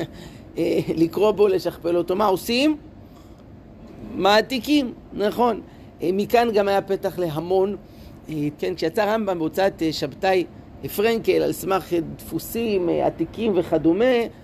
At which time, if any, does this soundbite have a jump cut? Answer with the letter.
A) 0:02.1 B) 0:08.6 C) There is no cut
B